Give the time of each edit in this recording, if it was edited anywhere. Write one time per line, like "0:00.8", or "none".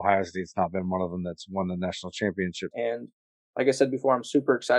0:02.7